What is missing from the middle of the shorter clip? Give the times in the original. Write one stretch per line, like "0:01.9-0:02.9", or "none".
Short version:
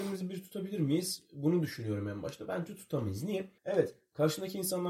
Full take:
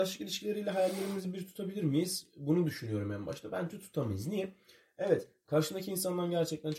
0:04.6-0:04.9